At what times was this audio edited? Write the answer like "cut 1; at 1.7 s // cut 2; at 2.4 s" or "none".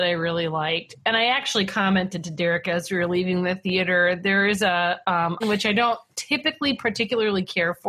cut 1; at 5.4 s